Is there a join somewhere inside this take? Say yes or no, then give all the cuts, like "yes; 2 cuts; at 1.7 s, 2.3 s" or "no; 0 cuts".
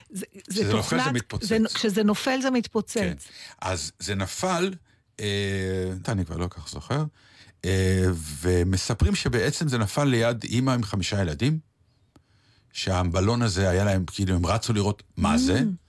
yes; 1 cut; at 6.0 s